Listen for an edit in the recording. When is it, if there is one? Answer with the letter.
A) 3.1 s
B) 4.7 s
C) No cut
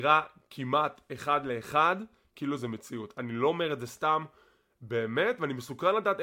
C